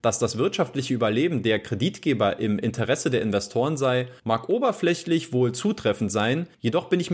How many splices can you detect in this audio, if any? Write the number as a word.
zero